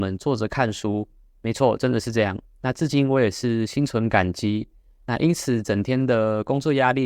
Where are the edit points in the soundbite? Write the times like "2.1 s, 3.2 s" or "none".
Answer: none